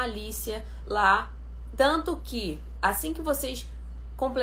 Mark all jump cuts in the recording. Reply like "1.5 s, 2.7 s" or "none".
1.8 s, 2.8 s